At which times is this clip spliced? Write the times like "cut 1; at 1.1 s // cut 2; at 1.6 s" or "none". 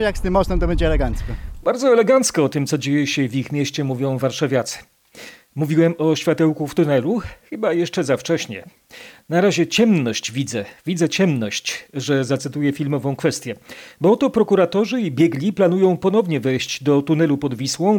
none

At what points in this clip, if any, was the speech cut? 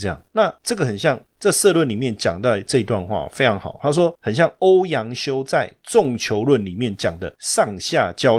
none

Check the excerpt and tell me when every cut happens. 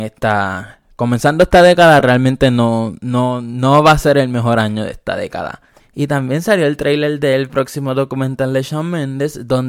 none

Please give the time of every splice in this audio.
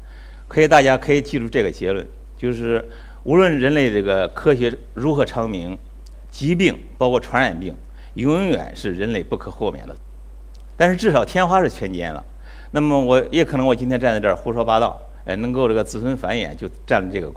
none

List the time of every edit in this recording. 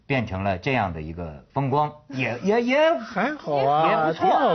cut 1; at 1.5 s

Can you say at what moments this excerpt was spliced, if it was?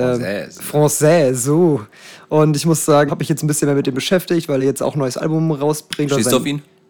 cut 1; at 3.1 s // cut 2; at 4.6 s

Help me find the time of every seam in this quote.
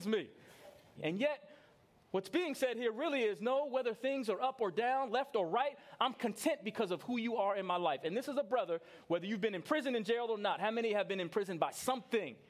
cut 1; at 1.0 s

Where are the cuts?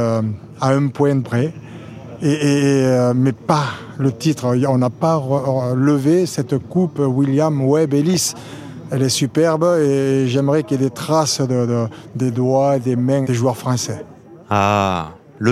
cut 1; at 13.2 s

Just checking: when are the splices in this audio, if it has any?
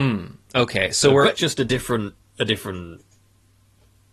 cut 1; at 1.4 s

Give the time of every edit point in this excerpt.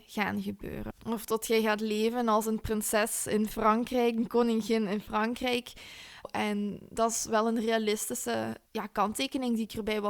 cut 1; at 6.2 s // cut 2; at 8.7 s

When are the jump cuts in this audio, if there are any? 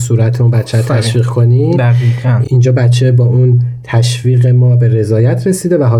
none

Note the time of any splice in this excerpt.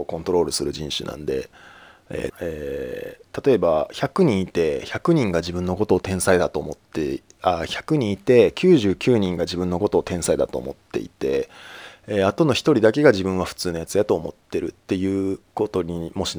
cut 1; at 2.3 s

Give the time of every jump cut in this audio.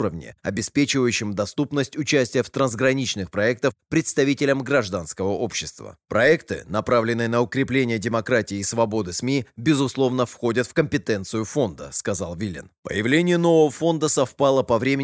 none

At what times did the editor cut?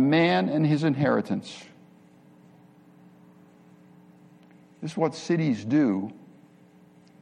none

